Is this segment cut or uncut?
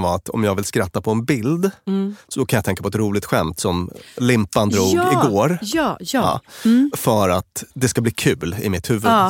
cut